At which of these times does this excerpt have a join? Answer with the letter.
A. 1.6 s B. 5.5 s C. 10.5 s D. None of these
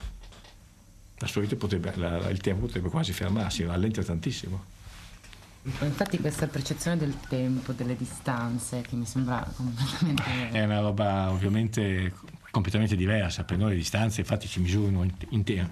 C